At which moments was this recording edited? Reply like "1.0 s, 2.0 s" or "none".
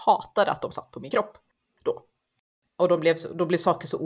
none